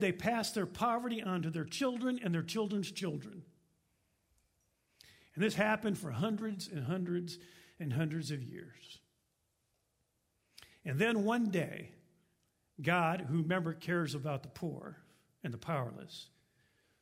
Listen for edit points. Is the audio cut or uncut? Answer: uncut